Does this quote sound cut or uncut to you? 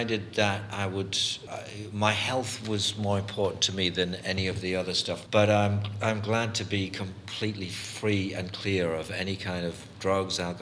cut